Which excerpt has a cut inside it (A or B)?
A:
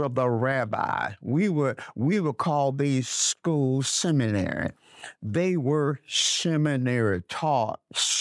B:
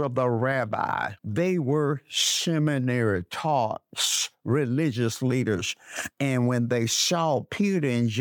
B